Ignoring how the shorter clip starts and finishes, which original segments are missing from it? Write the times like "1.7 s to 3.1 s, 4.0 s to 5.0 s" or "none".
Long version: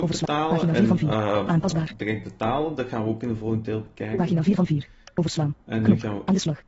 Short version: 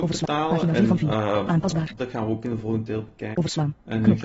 2.0 s to 2.8 s, 4.1 s to 5.1 s